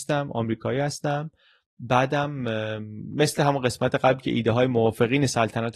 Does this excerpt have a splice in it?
no; 0 cuts

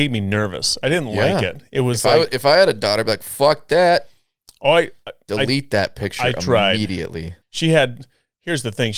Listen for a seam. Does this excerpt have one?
yes; 1 cut; at 7.4 s

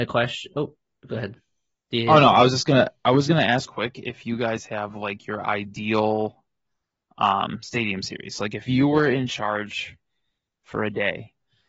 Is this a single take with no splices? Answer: no; 1 cut; at 3.7 s

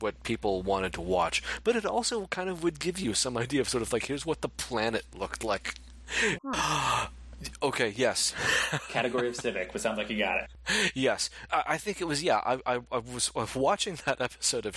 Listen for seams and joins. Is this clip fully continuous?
no; 1 cut; at 6.4 s

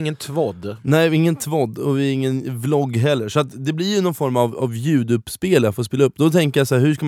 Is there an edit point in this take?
no; 0 cuts

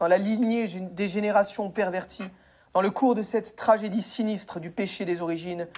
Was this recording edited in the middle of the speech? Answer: no; 0 cuts

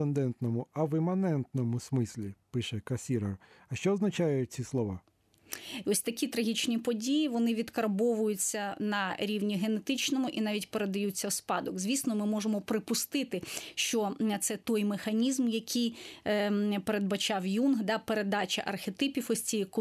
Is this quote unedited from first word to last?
no; 1 cut; at 5.8 s

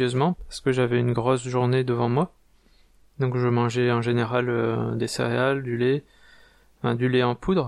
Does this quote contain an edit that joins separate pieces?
no; 0 cuts

